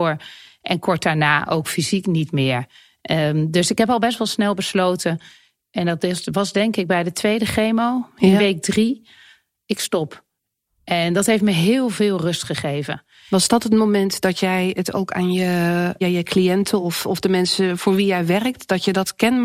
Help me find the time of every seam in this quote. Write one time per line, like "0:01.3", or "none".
none